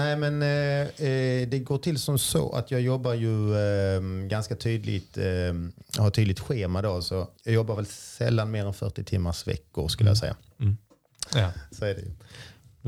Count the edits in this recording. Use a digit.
2